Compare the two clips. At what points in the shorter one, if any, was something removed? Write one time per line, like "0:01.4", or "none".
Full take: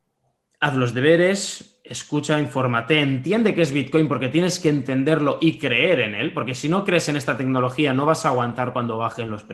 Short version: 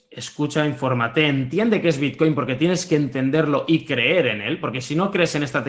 none